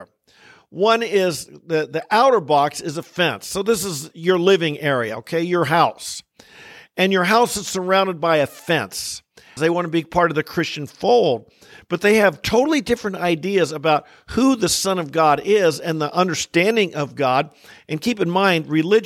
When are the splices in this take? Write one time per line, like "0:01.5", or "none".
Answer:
0:09.6